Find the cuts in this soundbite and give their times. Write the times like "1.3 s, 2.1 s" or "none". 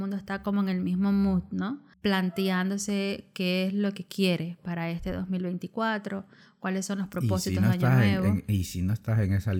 none